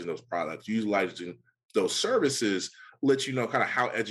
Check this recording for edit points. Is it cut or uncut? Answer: uncut